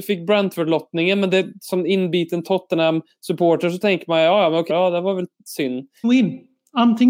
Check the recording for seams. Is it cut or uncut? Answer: cut